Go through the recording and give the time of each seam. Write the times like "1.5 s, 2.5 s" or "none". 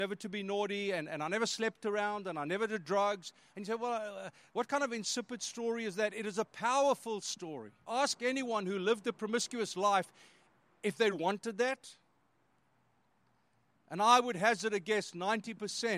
7.9 s, 11.1 s